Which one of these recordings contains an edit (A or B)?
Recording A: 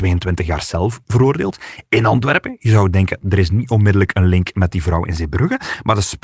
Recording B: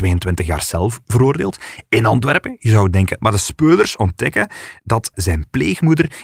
B